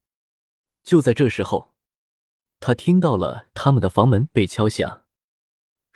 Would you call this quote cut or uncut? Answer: uncut